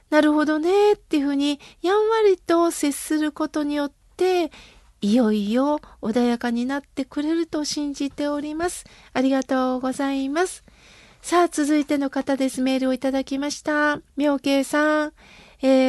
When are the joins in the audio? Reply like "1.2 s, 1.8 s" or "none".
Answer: 14.1 s

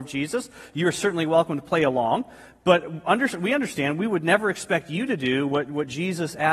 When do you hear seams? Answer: none

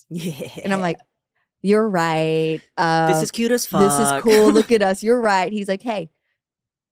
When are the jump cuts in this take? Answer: none

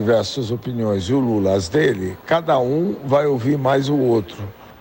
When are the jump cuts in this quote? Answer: none

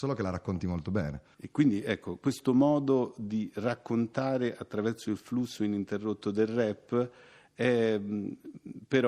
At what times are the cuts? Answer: none

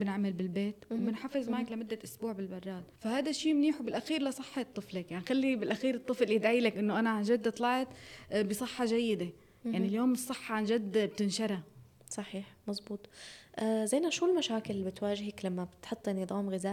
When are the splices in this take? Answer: 3.0 s

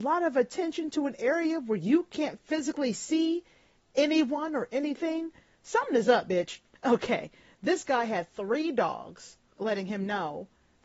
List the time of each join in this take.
6.8 s, 9.5 s

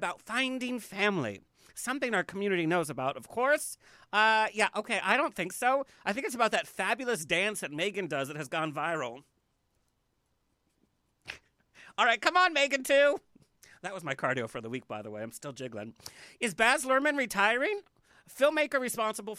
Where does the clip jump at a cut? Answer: none

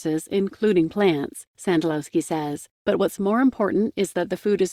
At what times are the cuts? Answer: 2.7 s

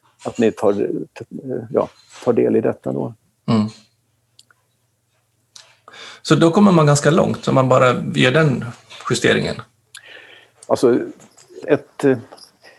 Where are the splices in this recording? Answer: 11.6 s

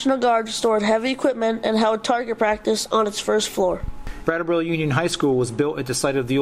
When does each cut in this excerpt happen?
4.2 s

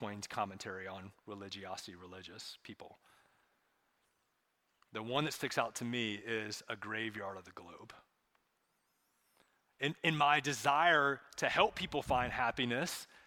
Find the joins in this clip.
none

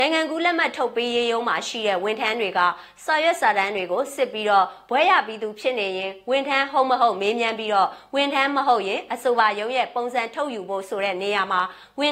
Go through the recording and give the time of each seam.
none

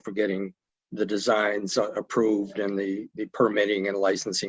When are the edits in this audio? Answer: none

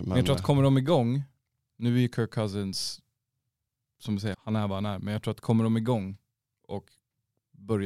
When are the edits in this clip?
4.3 s

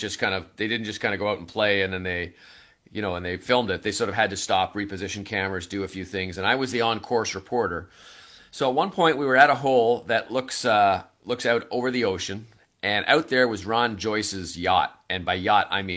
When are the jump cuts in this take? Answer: none

